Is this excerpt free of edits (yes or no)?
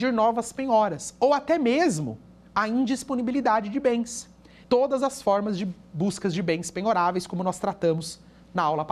no